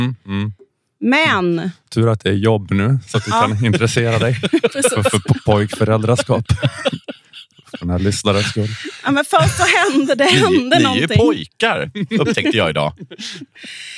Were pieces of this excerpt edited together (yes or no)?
no